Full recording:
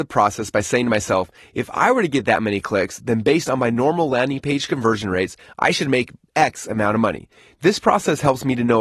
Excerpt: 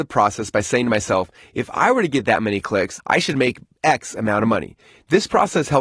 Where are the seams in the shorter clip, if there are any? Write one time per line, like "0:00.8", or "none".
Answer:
0:03.0